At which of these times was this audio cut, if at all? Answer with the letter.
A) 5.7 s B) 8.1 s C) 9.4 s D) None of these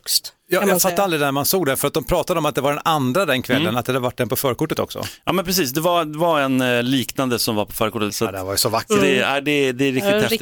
B